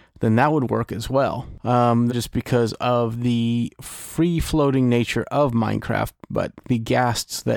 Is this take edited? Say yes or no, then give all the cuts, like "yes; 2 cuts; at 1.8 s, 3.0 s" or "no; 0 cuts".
yes; 2 cuts; at 2.1 s, 6.6 s